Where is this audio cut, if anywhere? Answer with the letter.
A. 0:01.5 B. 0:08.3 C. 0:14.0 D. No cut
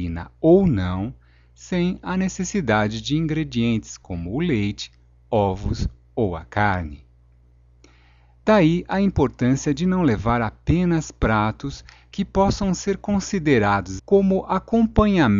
C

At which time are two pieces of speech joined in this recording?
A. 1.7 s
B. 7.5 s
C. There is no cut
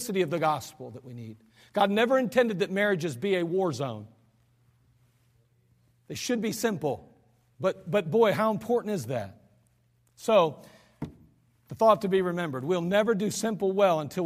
B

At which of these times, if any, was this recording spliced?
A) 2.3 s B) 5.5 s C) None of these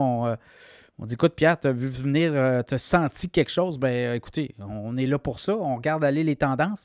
C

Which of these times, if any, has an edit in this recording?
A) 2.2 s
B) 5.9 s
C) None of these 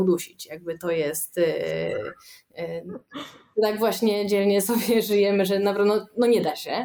C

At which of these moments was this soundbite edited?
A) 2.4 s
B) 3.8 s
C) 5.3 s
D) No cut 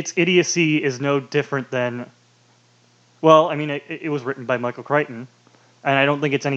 D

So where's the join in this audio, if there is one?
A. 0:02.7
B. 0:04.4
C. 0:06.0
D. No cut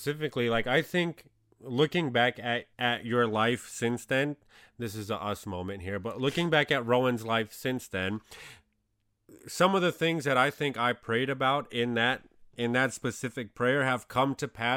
A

